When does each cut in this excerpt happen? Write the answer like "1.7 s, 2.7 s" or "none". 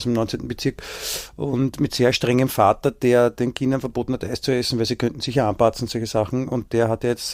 none